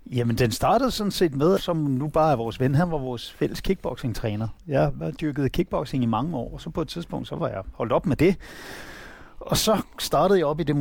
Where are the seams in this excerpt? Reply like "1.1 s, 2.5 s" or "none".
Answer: 1.6 s